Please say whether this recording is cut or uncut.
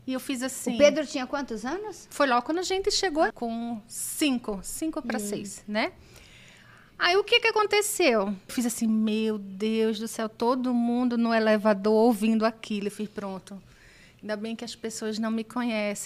cut